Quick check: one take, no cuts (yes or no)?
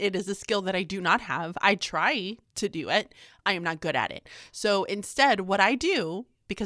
yes